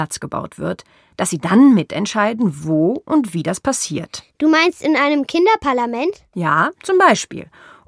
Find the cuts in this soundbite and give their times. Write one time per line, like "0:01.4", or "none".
none